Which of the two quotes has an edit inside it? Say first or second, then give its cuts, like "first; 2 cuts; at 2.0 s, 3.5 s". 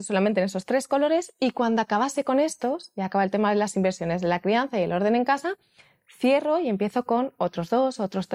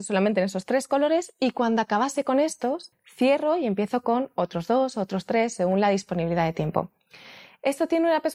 second; 1 cut; at 2.9 s